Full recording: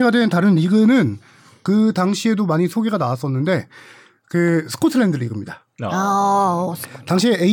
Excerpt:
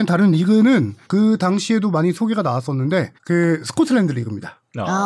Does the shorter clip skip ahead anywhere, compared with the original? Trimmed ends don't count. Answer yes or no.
yes